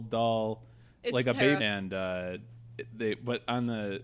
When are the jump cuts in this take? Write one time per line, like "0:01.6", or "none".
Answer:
0:01.6